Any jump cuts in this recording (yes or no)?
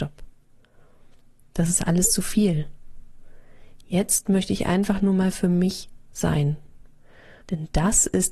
yes